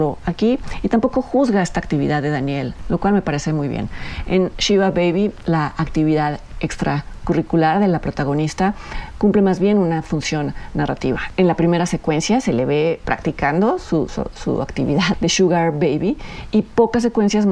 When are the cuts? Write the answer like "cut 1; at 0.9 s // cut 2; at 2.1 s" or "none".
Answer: cut 1; at 14.1 s // cut 2; at 15.1 s